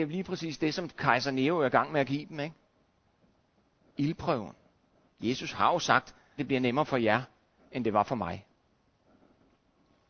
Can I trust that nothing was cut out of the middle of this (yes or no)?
no